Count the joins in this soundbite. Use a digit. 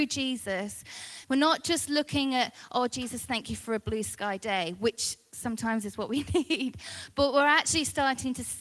1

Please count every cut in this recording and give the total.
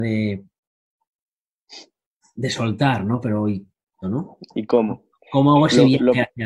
1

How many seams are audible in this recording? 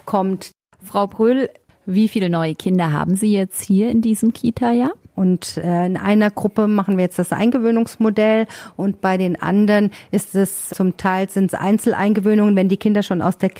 2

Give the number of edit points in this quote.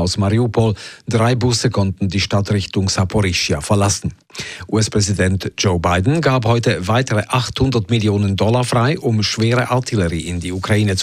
0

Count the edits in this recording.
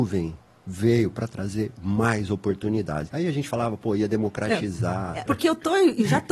2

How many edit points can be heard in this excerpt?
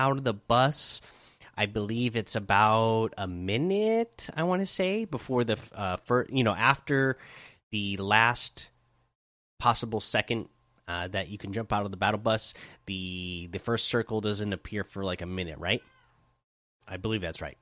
0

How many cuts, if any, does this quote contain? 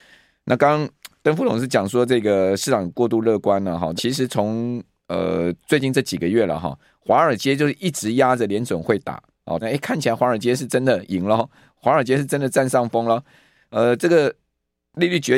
2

